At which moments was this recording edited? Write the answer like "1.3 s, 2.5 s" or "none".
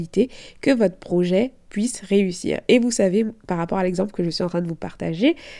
none